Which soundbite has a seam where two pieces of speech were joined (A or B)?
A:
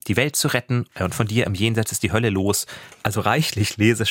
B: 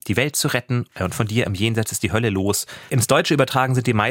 B